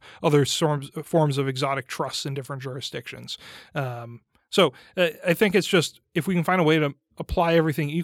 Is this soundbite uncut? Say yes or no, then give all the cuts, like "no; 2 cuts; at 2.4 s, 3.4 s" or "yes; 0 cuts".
yes; 0 cuts